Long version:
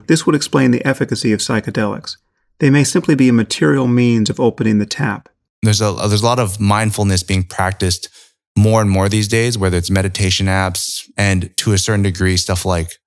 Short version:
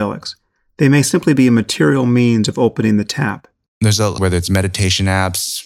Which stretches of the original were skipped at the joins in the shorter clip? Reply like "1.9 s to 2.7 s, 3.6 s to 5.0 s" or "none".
6.0 s to 9.6 s